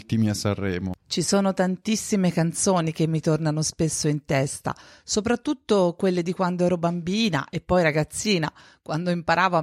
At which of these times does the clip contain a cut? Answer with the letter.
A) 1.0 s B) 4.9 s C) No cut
A